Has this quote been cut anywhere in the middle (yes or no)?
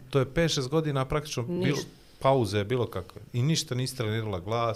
no